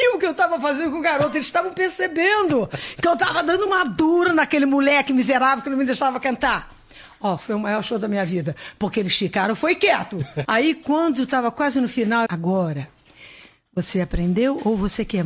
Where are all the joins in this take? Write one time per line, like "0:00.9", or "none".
0:10.4
0:12.3